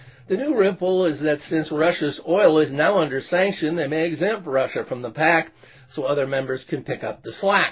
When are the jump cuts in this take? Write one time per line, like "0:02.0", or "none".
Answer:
none

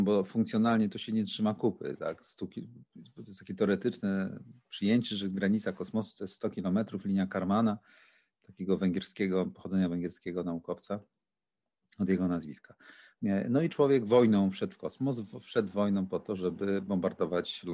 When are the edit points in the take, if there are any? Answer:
0:13.2

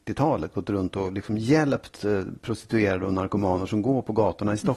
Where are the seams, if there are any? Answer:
none

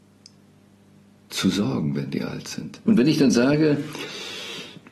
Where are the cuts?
0:02.8

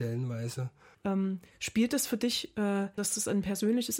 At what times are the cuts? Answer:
0:00.9
0:03.0

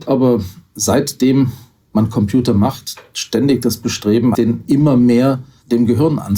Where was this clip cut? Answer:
0:04.3

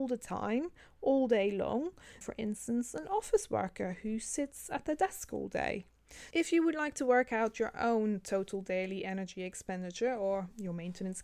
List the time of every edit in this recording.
0:02.2
0:06.3

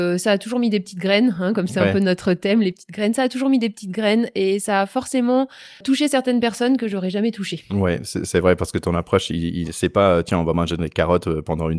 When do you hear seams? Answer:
0:05.8

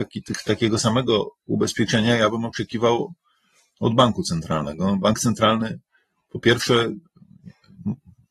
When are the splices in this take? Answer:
none

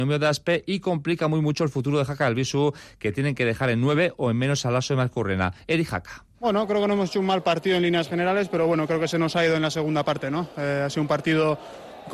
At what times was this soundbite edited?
0:06.3

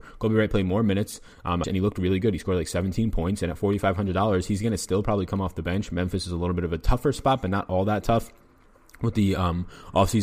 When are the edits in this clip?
0:01.6

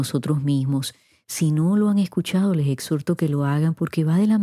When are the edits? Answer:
none

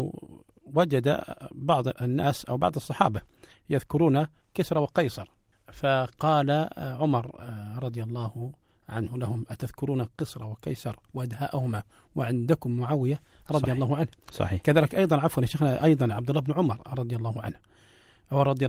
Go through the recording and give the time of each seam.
none

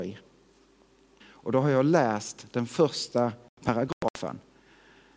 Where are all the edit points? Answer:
0:01.2

